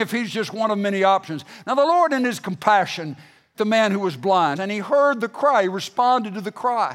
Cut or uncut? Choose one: cut